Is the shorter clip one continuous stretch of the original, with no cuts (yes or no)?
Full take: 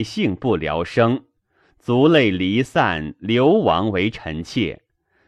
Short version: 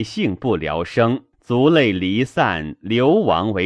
no